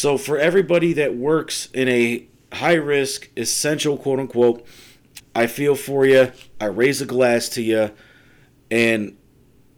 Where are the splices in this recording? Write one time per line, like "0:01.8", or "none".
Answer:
0:05.2